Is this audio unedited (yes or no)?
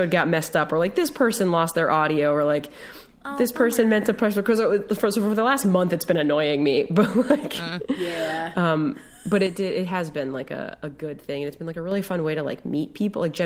yes